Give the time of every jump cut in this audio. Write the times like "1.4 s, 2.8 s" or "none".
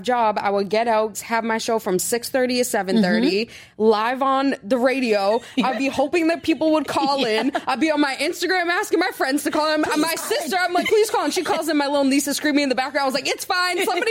1.1 s, 10.8 s